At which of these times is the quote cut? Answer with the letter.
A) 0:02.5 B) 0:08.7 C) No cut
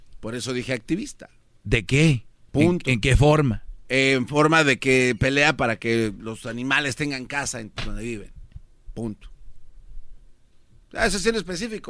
A